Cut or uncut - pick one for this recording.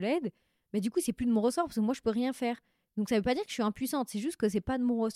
uncut